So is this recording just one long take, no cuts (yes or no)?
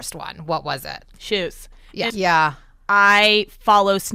no